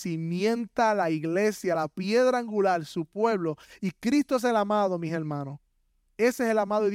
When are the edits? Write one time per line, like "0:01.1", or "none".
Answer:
0:01.8